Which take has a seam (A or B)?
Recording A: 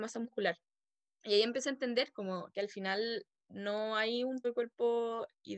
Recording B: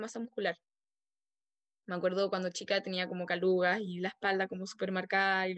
A